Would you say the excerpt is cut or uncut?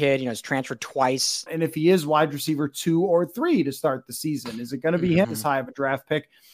cut